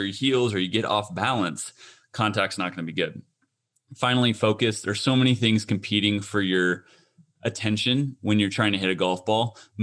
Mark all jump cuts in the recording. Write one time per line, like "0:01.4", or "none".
none